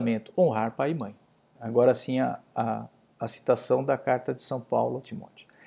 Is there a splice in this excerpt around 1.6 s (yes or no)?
yes